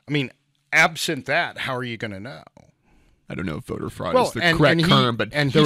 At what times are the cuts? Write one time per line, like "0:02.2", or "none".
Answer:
0:03.2